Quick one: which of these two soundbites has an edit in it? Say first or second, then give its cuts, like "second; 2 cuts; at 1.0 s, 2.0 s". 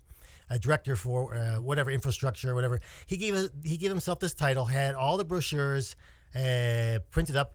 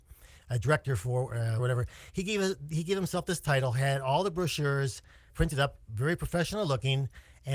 second; 2 cuts; at 1.6 s, 5.3 s